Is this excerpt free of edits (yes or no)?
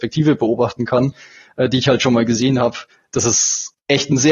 yes